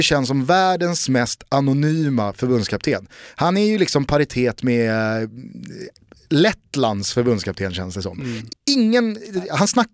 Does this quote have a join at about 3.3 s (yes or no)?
no